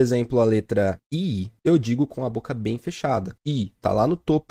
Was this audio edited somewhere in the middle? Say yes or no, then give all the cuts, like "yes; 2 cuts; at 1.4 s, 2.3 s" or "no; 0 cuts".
yes; 1 cut; at 3.4 s